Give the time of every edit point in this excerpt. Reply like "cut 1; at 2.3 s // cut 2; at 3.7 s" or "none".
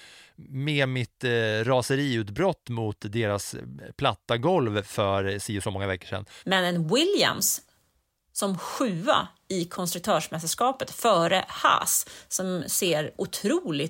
cut 1; at 6.4 s